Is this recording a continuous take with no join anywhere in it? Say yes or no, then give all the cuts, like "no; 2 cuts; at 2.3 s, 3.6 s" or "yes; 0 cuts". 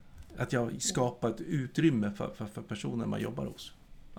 yes; 0 cuts